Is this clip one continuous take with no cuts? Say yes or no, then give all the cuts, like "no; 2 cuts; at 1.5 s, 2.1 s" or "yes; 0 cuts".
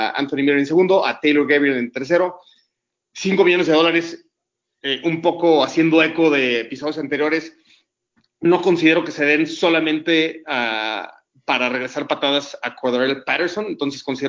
yes; 0 cuts